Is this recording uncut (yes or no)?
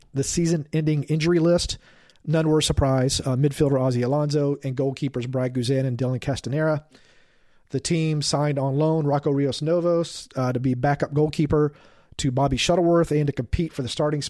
yes